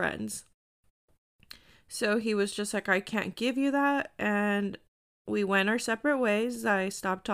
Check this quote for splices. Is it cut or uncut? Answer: uncut